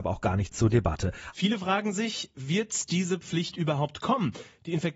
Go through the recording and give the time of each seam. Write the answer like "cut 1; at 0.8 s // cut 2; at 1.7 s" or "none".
cut 1; at 1.3 s